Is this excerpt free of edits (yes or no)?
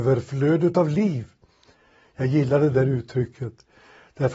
yes